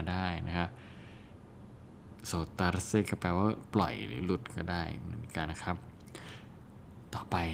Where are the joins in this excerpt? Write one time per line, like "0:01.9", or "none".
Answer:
0:05.5